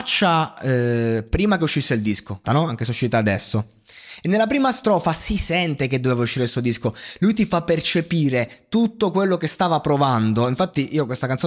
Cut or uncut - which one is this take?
cut